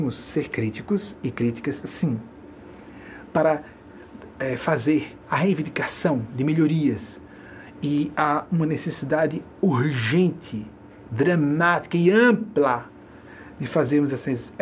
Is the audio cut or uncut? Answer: uncut